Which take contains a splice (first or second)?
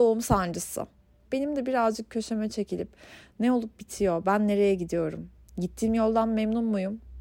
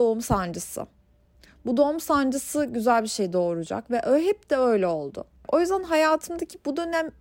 first